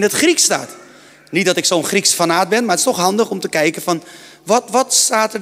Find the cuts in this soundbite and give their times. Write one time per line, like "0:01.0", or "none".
none